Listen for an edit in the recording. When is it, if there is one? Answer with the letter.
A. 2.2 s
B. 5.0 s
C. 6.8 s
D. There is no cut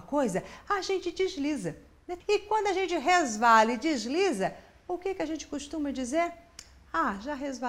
A